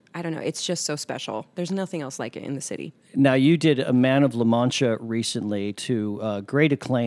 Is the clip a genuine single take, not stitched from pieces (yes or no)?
yes